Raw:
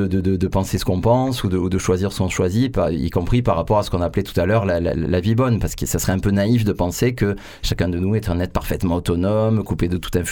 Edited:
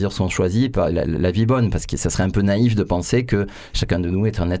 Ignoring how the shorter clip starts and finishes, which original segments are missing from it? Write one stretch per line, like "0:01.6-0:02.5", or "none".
0:02.9-0:04.8